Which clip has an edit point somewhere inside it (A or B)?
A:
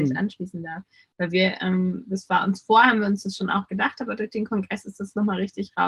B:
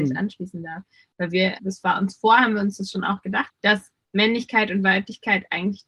B